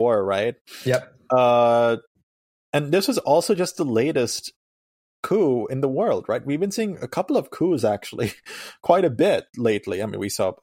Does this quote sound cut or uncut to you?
uncut